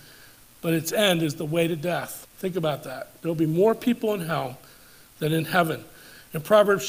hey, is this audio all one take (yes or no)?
no